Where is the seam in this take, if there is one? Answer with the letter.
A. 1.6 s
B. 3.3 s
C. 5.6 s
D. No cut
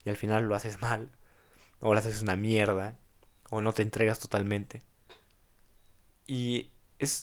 D